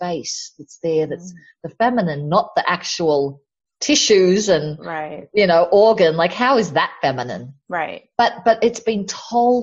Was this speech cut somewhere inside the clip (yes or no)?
no